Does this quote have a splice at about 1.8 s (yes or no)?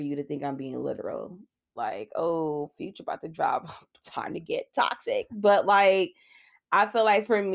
yes